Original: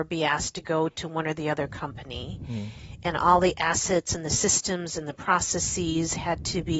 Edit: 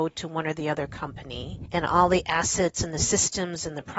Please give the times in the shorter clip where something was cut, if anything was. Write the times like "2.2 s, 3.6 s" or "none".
1.7 s